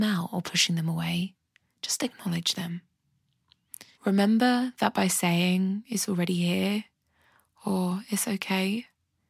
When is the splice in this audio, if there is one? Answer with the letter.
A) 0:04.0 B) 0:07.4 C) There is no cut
A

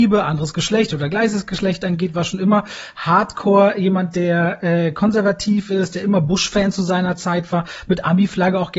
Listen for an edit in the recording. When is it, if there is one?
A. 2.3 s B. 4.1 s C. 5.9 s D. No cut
D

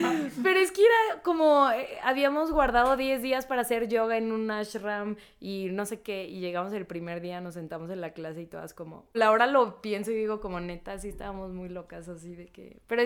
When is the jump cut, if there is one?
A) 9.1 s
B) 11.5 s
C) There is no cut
A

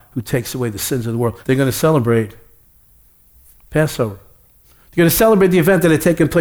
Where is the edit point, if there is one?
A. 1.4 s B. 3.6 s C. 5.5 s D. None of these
A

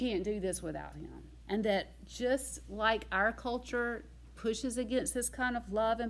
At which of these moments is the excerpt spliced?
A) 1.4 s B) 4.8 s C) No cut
A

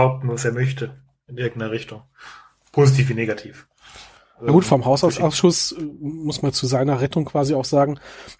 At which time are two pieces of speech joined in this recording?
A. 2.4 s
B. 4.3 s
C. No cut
C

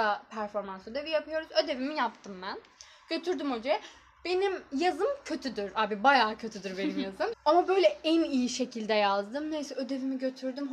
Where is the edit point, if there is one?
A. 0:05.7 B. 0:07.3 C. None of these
B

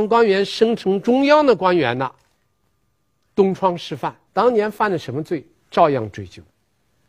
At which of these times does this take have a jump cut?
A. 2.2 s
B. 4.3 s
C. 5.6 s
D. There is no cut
B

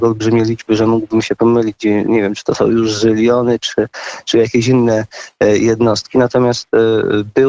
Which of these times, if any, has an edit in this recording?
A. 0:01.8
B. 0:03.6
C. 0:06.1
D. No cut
D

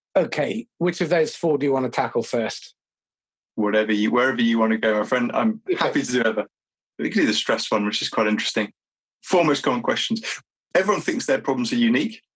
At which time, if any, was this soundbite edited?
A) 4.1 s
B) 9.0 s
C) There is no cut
B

